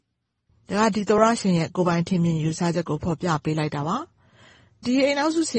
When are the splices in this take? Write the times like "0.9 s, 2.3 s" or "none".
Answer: none